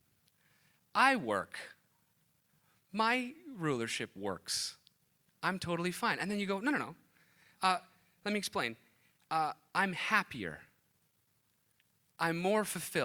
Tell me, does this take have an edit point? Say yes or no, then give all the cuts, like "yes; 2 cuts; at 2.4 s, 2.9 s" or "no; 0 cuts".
no; 0 cuts